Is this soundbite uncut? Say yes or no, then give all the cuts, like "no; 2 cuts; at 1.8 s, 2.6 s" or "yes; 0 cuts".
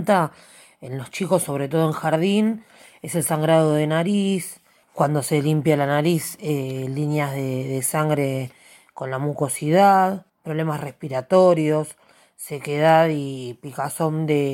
yes; 0 cuts